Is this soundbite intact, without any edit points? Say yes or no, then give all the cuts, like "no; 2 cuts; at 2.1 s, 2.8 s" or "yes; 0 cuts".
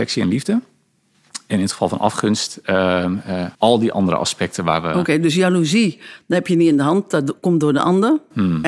no; 1 cut; at 3.5 s